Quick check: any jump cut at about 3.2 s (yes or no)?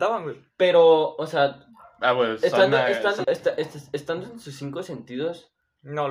yes